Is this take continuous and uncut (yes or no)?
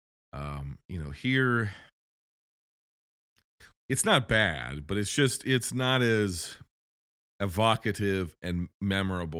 no